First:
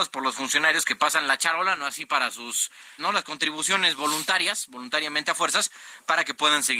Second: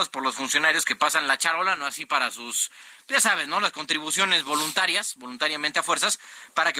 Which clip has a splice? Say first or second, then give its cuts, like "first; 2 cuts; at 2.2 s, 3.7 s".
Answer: first; 1 cut; at 3.0 s